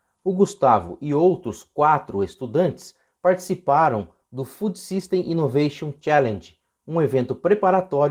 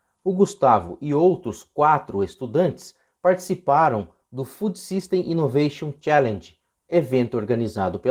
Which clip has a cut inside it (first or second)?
second